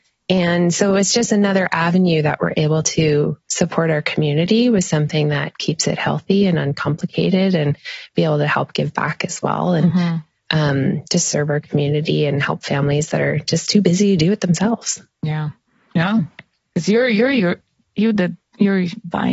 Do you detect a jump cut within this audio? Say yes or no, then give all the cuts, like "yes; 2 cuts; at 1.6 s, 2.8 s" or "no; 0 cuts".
no; 0 cuts